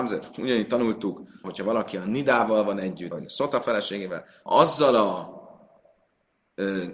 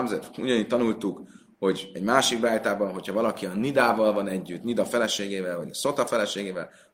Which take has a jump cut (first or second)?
first